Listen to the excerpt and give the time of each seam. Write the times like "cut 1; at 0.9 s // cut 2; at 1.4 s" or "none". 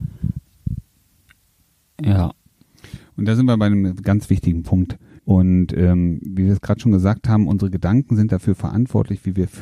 cut 1; at 5.2 s